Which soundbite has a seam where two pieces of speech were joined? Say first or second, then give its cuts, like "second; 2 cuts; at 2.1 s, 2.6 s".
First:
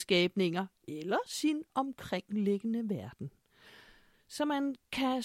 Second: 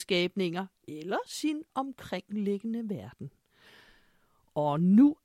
first; 1 cut; at 4.1 s